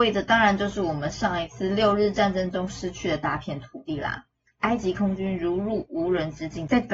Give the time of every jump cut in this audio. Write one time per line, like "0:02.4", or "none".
0:04.5